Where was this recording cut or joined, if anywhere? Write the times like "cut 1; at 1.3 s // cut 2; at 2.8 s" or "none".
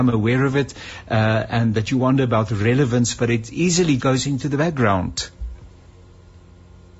cut 1; at 4.0 s